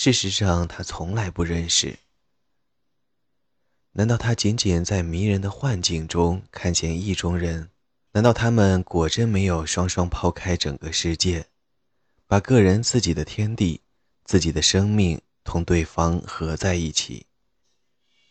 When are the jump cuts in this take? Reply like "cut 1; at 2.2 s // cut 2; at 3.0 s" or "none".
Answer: cut 1; at 8.1 s